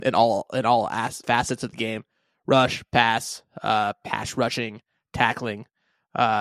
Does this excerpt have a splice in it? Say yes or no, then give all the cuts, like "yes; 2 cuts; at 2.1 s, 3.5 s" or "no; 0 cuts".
yes; 1 cut; at 1.2 s